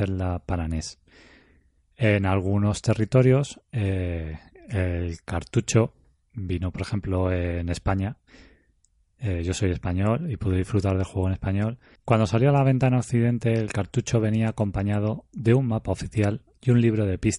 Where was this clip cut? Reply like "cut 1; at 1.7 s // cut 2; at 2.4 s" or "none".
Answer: cut 1; at 12.0 s

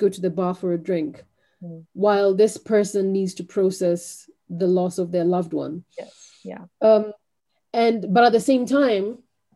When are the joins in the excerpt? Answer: none

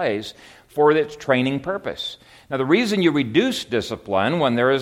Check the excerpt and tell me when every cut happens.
none

